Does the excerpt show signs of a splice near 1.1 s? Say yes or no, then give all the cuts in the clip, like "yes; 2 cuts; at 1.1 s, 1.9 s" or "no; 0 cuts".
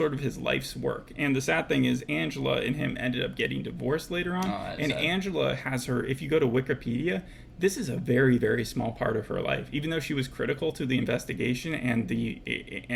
no; 0 cuts